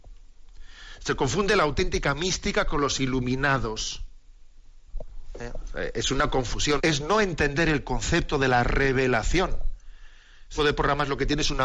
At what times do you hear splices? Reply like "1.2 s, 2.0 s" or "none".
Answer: 6.8 s, 10.6 s